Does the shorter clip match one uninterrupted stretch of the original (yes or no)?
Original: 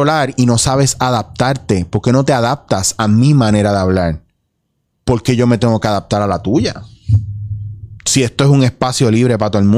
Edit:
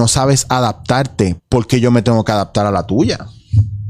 no